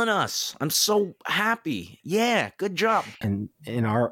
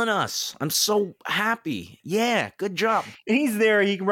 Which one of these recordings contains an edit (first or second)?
first